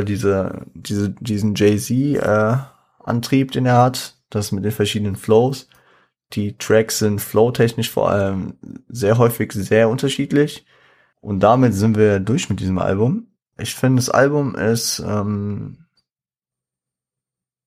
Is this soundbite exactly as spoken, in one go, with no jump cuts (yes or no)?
no